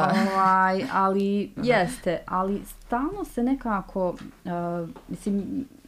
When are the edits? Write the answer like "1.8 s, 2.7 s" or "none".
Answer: 1.6 s